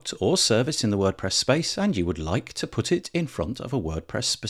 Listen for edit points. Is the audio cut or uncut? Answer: uncut